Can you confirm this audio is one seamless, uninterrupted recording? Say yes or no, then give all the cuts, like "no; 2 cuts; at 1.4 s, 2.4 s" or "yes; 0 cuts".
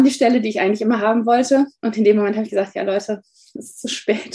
yes; 0 cuts